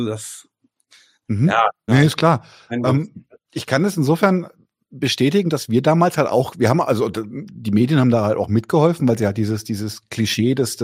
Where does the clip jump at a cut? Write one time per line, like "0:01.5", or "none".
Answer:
0:01.9